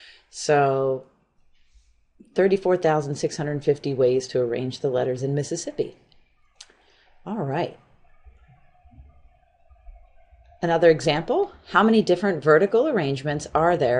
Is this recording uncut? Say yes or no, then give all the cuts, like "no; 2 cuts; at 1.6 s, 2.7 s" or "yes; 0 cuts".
yes; 0 cuts